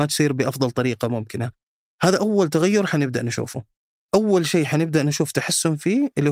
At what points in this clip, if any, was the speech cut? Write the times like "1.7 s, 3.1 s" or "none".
1.8 s, 4.0 s